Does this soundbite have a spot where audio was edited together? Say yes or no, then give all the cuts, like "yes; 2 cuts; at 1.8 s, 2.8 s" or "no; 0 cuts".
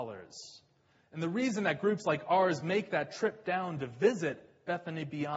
no; 0 cuts